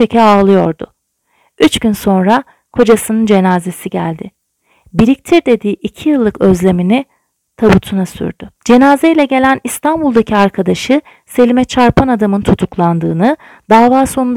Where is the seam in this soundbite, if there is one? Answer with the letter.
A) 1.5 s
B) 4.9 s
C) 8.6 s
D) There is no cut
C